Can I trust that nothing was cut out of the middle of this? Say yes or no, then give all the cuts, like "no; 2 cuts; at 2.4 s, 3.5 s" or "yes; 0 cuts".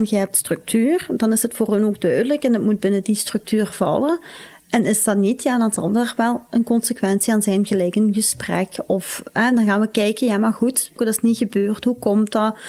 no; 1 cut; at 11.0 s